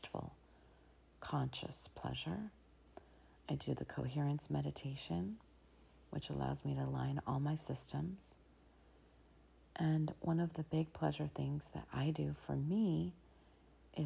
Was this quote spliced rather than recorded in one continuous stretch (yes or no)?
no